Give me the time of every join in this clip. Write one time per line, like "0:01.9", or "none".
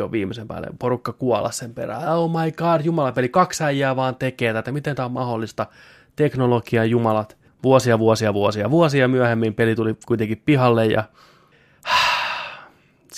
none